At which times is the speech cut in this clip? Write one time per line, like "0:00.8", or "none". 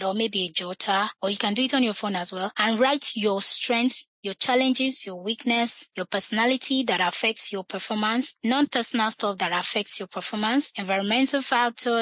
none